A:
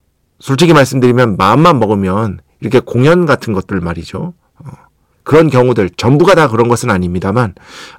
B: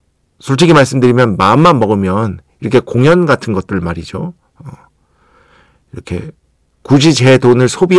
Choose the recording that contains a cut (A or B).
A